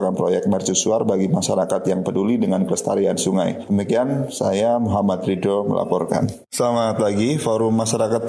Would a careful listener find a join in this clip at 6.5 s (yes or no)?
yes